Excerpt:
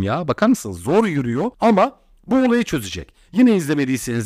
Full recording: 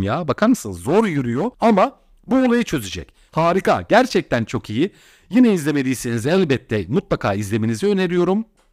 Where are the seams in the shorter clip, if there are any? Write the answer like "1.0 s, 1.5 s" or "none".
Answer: 3.3 s